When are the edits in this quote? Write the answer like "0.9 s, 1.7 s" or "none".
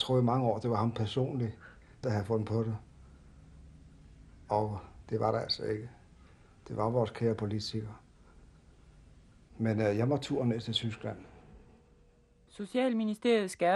2.0 s

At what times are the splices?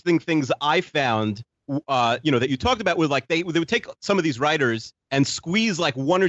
none

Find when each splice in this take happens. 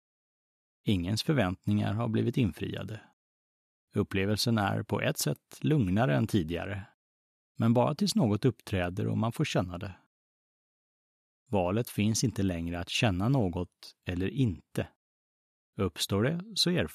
none

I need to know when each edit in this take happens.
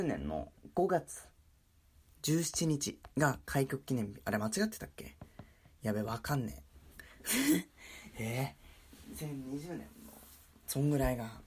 3.1 s

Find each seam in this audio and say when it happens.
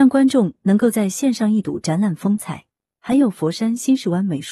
2.9 s

